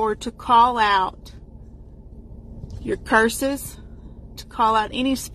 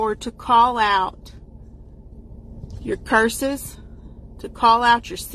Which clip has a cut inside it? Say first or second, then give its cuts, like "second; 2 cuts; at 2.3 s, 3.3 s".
first; 1 cut; at 4.4 s